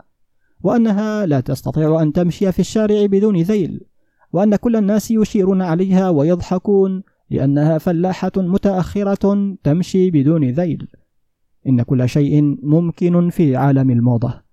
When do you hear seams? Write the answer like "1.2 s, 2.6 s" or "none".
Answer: none